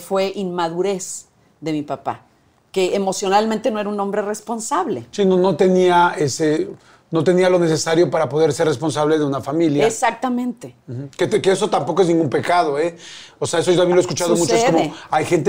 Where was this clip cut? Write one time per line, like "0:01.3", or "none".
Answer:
none